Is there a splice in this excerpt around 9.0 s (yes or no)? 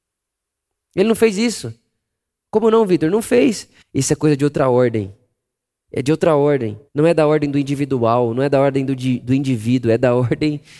no